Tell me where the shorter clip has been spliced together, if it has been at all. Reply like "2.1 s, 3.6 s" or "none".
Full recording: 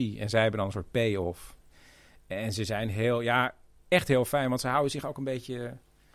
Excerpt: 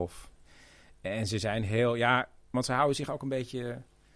2.5 s